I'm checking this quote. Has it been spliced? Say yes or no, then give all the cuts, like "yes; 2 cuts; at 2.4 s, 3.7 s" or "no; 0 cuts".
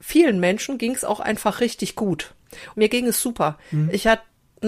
yes; 1 cut; at 2.7 s